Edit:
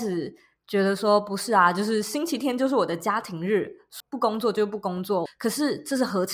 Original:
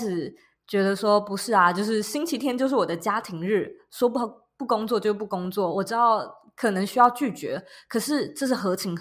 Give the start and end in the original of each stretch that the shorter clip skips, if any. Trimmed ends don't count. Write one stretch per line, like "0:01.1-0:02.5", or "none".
0:04.0-0:04.5
0:05.7-0:07.8